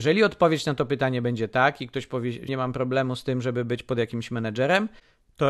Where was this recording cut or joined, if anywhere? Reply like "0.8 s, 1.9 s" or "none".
2.5 s